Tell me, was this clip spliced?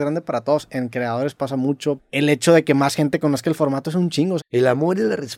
yes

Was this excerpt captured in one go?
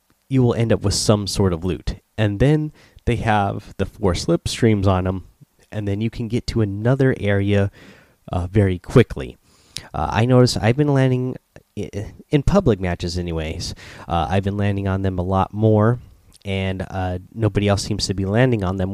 yes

